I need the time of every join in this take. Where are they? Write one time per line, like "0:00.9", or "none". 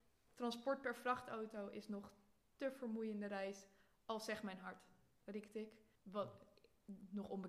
0:06.0